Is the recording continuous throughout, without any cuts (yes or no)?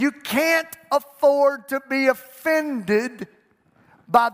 yes